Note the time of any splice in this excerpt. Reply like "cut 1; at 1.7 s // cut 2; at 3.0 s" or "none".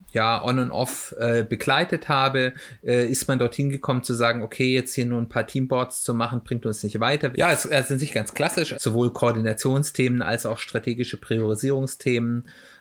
cut 1; at 7.3 s // cut 2; at 8.7 s

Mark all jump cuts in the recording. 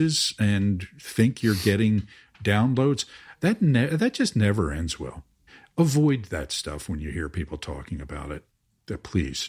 none

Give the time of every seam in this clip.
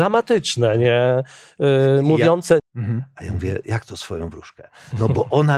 cut 1; at 2.6 s

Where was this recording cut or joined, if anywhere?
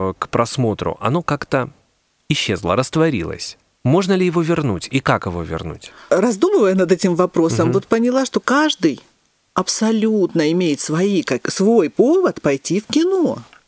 cut 1; at 8.4 s

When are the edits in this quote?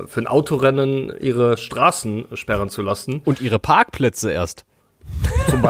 cut 1; at 1.2 s

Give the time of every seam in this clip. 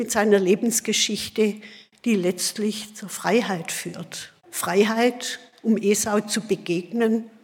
cut 1; at 4.4 s

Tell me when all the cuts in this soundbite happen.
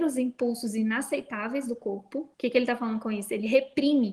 cut 1; at 2.3 s

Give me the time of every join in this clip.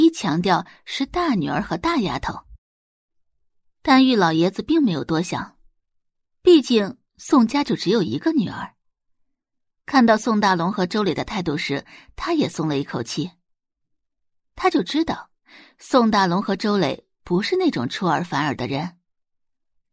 none

